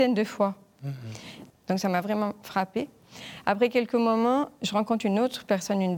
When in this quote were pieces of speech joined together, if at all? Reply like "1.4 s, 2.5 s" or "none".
1.5 s